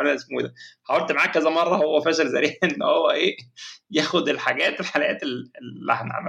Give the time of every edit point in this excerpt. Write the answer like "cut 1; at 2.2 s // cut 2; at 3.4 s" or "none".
cut 1; at 2.0 s